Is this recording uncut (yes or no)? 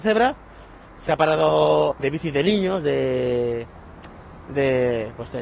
no